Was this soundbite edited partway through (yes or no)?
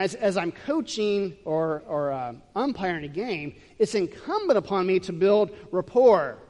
no